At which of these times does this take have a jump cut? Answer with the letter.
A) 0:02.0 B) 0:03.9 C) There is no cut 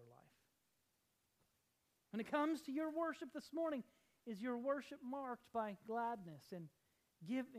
C